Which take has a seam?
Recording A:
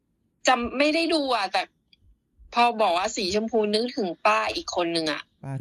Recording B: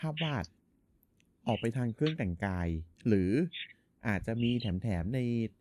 B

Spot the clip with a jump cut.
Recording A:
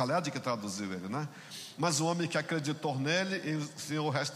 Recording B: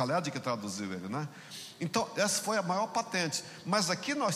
A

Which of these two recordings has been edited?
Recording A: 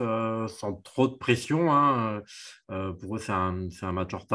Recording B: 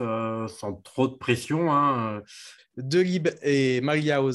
B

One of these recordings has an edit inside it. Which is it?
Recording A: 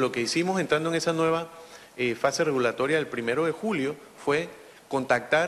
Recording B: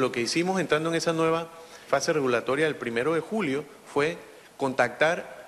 B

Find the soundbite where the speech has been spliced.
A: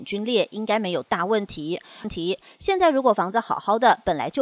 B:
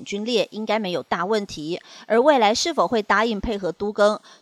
A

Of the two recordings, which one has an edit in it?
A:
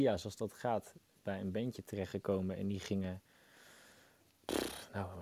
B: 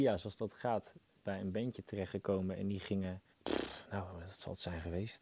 B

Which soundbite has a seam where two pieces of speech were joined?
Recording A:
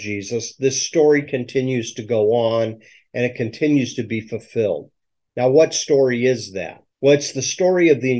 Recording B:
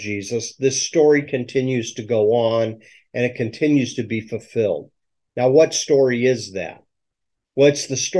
A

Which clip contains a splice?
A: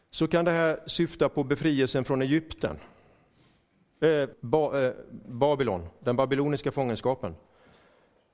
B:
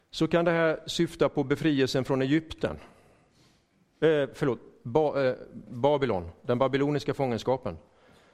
A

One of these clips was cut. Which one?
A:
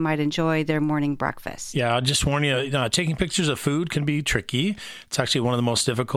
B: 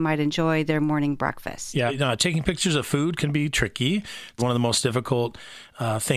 B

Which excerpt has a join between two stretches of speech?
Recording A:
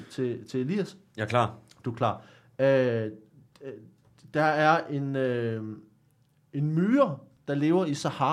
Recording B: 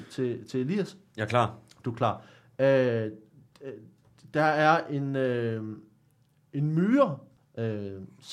B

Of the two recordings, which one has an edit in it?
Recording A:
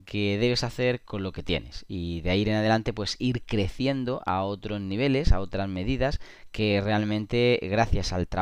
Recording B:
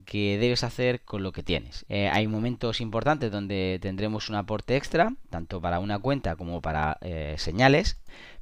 B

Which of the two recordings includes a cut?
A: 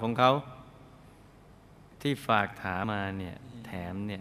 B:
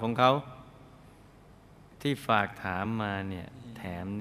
A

